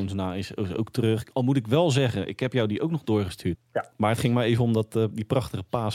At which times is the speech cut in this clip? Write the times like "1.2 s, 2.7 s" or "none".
3.6 s

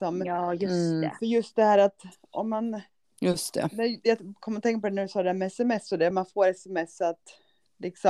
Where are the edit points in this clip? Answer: none

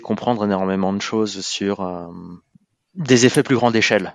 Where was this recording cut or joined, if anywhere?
none

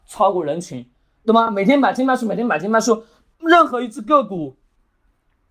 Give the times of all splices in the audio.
none

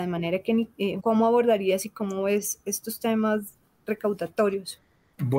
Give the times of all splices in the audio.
1.0 s

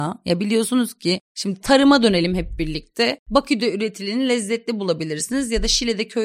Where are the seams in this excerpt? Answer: 3.2 s

